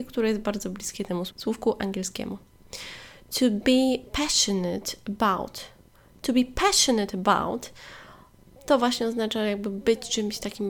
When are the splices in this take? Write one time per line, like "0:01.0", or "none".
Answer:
0:01.3